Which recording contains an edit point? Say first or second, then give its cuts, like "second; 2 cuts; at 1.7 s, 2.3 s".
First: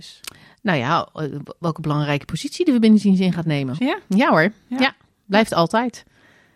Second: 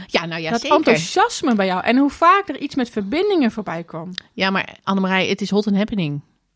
first; 1 cut; at 3.8 s